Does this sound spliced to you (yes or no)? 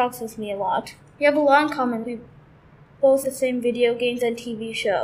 yes